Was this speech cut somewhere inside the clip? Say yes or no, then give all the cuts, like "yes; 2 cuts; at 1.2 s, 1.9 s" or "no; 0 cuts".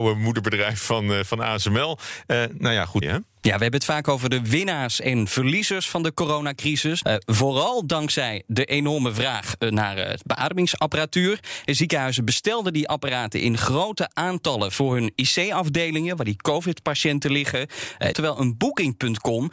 yes; 3 cuts; at 3.0 s, 7.0 s, 18.1 s